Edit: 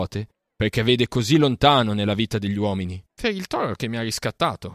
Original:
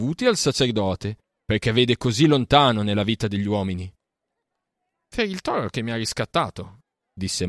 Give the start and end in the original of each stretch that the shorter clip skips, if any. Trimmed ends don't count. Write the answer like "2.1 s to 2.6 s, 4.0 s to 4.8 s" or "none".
4.0 s to 5.0 s